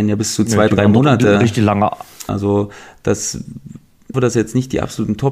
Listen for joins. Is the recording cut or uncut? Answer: cut